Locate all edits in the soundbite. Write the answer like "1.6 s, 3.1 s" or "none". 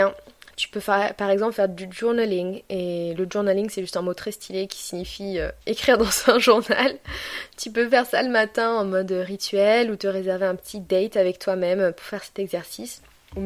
none

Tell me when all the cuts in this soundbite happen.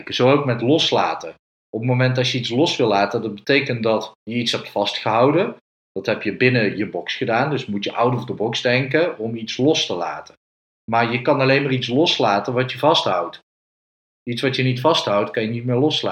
none

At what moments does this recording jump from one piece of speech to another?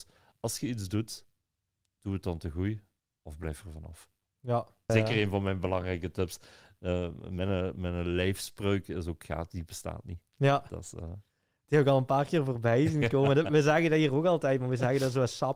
4.9 s

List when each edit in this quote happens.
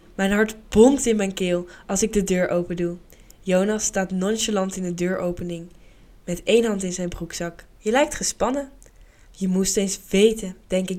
7.8 s, 9.3 s

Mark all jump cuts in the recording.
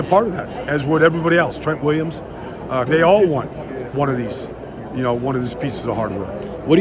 2.9 s

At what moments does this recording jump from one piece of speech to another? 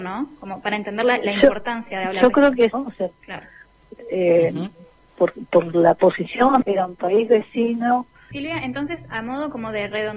2.7 s, 6.6 s, 8.3 s

